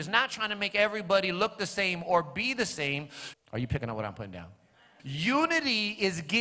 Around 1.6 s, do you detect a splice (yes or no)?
no